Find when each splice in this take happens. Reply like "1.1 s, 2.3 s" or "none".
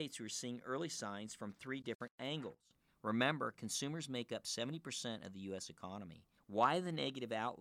2.9 s, 6.4 s